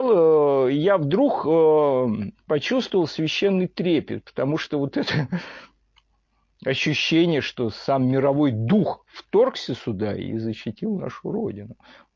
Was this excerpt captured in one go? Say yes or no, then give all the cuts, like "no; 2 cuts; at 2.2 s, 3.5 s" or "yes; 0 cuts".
yes; 0 cuts